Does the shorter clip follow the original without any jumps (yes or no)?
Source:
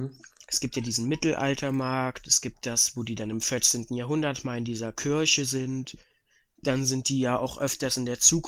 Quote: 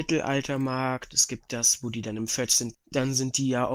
no